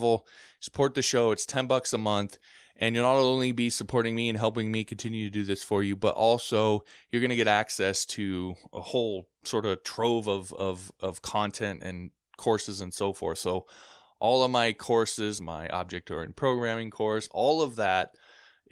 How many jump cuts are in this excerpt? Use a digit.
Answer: 2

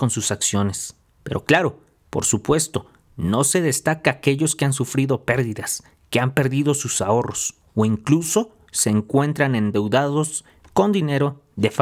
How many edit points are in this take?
1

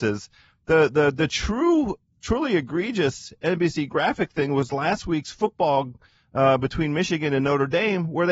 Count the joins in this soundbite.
0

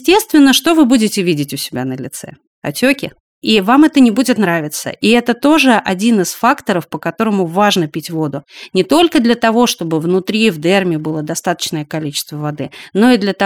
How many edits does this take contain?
0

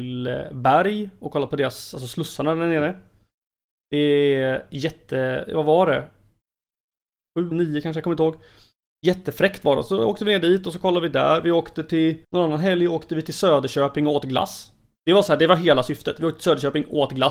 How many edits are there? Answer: 2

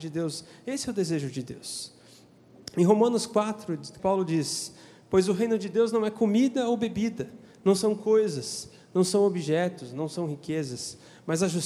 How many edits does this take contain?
1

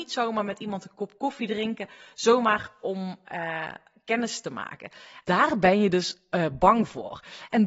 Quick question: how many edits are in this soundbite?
1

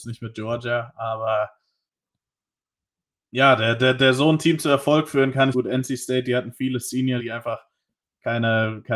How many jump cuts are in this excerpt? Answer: 2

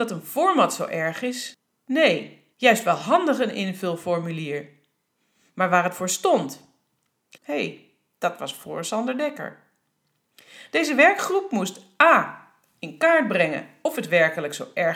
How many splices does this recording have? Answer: 2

